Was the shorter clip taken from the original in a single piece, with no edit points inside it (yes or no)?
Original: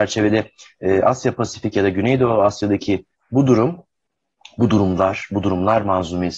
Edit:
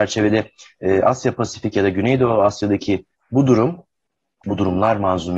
no